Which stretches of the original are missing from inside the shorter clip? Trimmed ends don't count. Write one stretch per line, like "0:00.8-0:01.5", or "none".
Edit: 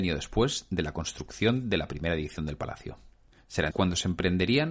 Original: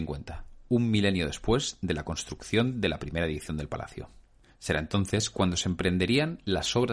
0:04.8-0:05.3